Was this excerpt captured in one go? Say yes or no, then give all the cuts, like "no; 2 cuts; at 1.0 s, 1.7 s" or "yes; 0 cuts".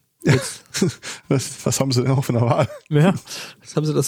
yes; 0 cuts